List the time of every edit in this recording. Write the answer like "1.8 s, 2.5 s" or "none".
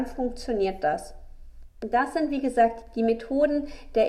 none